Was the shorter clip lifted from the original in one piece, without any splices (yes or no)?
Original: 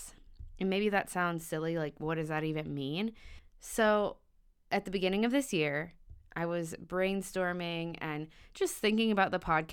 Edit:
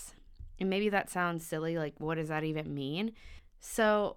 yes